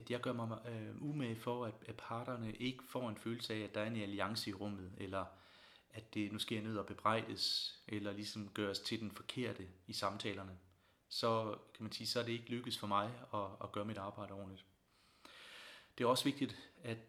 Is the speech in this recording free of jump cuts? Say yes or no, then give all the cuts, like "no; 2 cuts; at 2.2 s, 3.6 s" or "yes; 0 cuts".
yes; 0 cuts